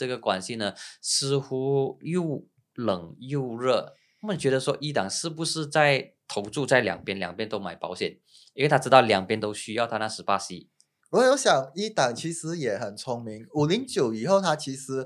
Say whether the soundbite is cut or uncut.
uncut